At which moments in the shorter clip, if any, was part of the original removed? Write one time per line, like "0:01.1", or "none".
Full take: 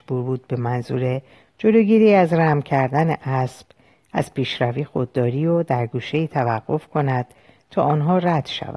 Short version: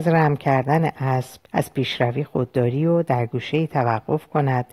0:01.5

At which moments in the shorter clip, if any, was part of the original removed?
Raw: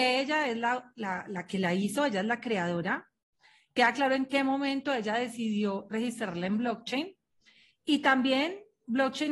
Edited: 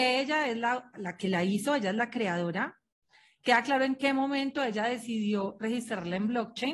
0:00.9

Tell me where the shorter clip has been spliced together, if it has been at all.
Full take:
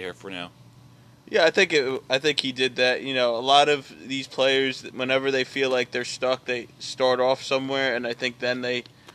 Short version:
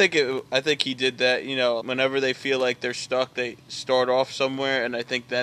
0:01.8

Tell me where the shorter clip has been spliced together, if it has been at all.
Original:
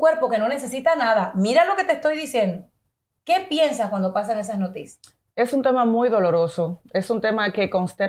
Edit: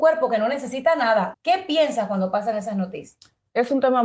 0:01.3

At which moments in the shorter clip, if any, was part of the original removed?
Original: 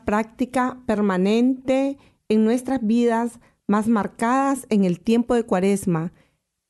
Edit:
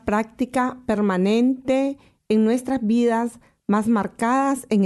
none

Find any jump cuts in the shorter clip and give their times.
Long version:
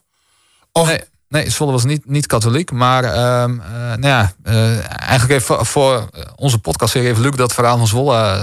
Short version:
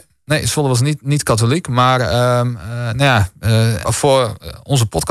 0:03.8

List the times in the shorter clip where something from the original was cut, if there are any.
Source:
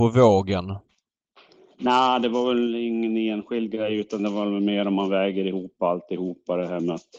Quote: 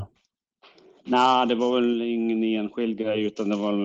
none

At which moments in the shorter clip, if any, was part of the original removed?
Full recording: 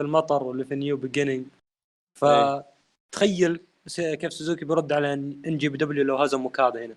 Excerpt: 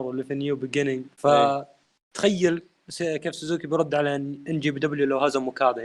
0:01.1

